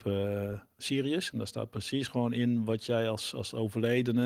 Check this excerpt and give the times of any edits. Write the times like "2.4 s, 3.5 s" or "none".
1.3 s